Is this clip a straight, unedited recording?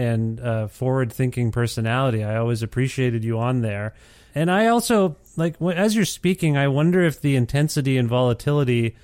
yes; 0 cuts

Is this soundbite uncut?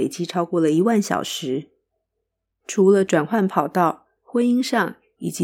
no; 1 cut; at 4.2 s

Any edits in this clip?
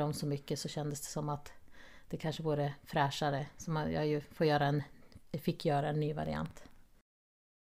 no; 0 cuts

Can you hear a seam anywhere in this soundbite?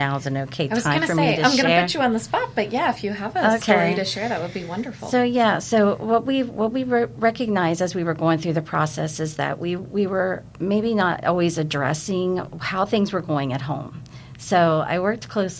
no; 0 cuts

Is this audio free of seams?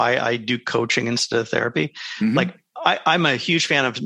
yes; 0 cuts

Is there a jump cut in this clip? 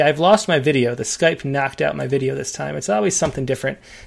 no; 0 cuts

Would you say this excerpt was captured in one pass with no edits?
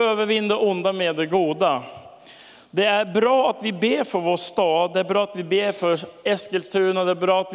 yes; 0 cuts

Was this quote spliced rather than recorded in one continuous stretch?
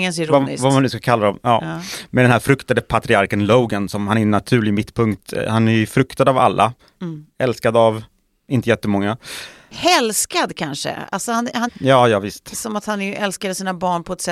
yes; 1 cut; at 11.7 s

